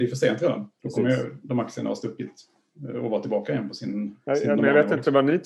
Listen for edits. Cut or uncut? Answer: uncut